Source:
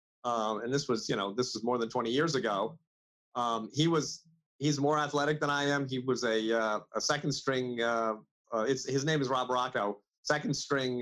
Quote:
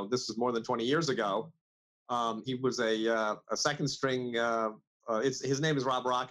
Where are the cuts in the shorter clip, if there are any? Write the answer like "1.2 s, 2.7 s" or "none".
2.5 s